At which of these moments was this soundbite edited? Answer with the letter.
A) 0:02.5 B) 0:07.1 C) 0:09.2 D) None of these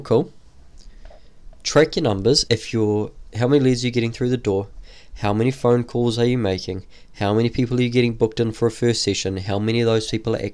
A